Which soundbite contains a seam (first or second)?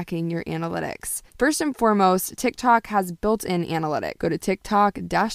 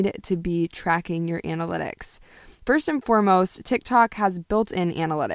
first